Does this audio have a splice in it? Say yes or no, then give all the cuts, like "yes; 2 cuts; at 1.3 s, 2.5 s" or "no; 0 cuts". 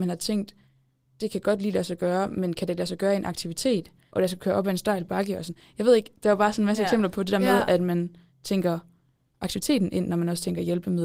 yes; 1 cut; at 4.1 s